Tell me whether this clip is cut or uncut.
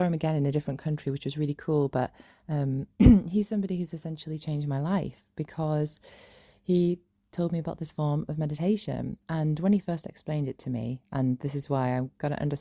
uncut